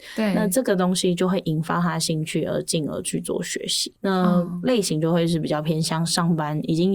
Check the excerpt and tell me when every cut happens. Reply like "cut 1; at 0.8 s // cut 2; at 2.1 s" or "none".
none